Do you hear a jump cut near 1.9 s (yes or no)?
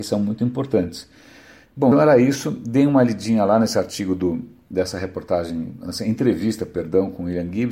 yes